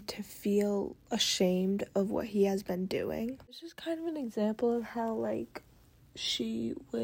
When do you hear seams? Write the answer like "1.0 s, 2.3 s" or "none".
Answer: 3.4 s